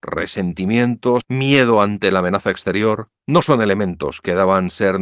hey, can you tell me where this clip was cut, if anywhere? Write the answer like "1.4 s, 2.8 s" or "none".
1.2 s, 3.2 s